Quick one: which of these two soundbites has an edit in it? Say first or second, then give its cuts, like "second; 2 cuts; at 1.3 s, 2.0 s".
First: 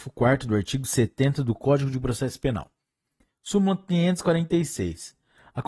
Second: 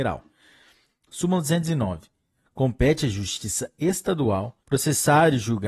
second; 1 cut; at 4.6 s